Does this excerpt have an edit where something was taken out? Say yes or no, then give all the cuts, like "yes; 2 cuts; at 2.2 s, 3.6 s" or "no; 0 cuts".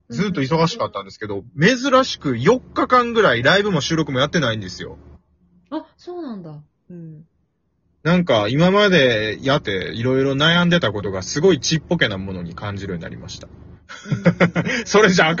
yes; 2 cuts; at 6.9 s, 9.6 s